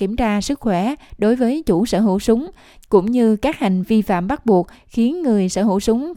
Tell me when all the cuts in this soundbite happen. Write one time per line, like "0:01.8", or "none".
0:03.8